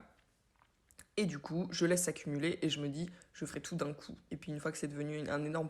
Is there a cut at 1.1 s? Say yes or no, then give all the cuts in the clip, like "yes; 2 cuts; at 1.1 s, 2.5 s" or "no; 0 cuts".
no; 1 cut; at 4.3 s